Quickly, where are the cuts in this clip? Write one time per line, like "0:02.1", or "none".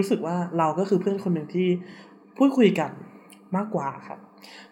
none